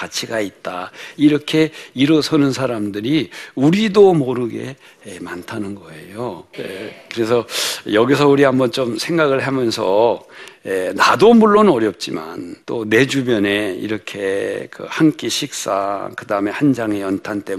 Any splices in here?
yes; 2 cuts; at 6.5 s, 12.6 s

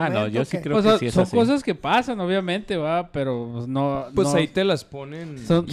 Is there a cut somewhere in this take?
no; 0 cuts

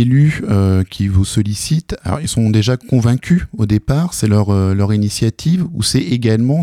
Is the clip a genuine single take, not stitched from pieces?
yes; 0 cuts

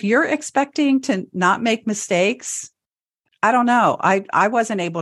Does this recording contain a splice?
yes; 1 cut; at 3.2 s

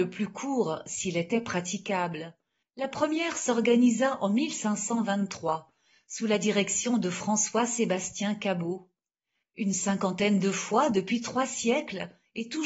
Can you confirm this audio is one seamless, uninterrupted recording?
no; 2 cuts; at 2.6 s, 9.4 s

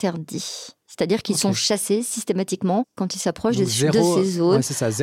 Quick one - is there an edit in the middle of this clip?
no; 0 cuts

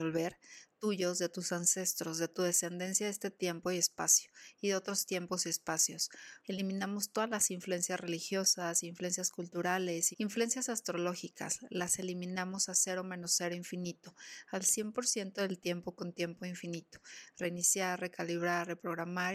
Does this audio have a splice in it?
yes; 2 cuts; at 6.4 s, 10.1 s

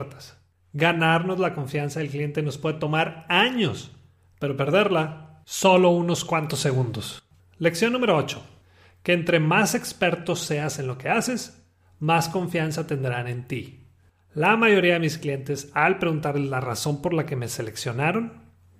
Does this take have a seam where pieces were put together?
no; 0 cuts

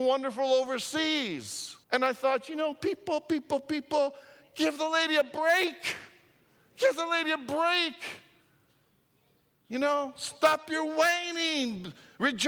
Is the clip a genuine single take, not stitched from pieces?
no; 1 cut; at 1.8 s

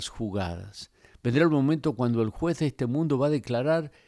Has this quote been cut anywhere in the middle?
no; 0 cuts

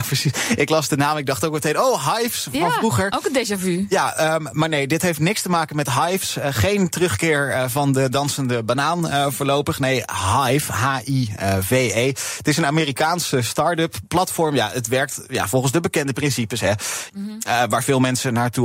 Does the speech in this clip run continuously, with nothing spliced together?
no; 1 cut; at 17.1 s

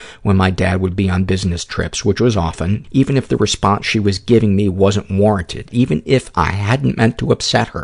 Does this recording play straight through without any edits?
no; 2 cuts; at 2.8 s, 5.7 s

